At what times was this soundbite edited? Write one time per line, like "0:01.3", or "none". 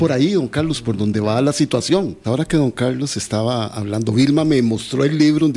0:02.2